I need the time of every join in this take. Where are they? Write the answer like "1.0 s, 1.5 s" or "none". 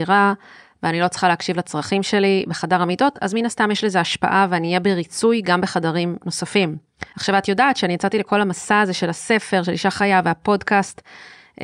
7.1 s